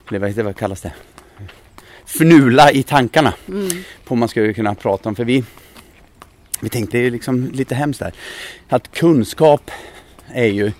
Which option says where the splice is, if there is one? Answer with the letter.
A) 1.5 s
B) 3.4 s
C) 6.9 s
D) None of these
C